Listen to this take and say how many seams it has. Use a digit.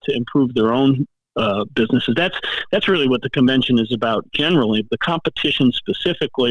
1